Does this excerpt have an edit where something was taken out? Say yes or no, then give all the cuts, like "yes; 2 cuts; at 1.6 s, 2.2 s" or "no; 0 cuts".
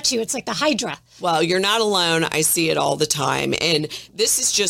no; 0 cuts